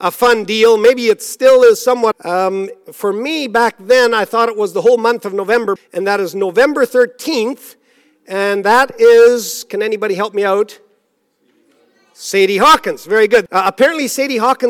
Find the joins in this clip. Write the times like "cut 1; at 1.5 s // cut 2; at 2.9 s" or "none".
cut 1; at 2.1 s // cut 2; at 5.8 s // cut 3; at 13.5 s